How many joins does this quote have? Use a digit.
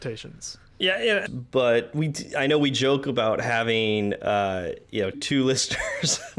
2